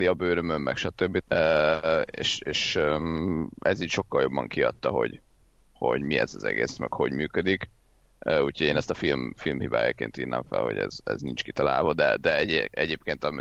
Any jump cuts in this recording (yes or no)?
yes